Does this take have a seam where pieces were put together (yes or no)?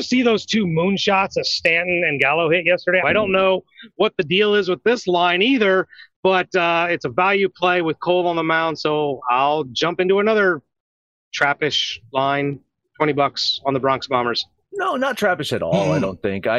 yes